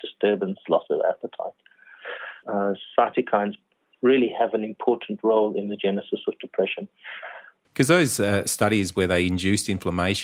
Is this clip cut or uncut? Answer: cut